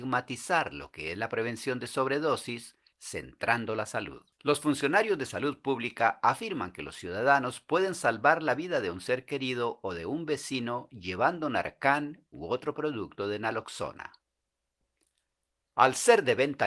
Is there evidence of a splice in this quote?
yes; 2 cuts; at 2.9 s, 4.3 s

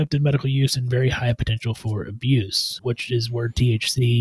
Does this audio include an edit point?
yes; 1 cut; at 2.8 s

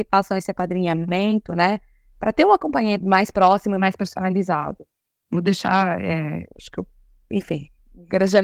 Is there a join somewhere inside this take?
yes; 1 cut; at 3.0 s

